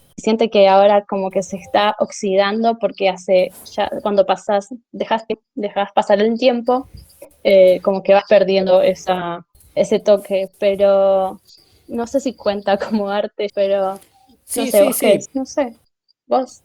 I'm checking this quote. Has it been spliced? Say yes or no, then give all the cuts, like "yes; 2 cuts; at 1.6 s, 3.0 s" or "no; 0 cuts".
yes; 3 cuts; at 9.8 s, 13.5 s, 15.3 s